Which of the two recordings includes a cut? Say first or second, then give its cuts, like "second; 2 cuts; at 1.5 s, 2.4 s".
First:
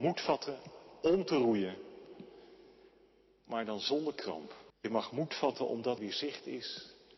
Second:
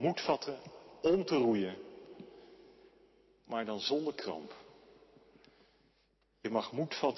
first; 2 cuts; at 4.7 s, 6.0 s